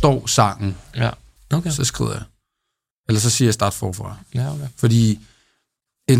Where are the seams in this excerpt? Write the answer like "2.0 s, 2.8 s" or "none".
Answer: 1.4 s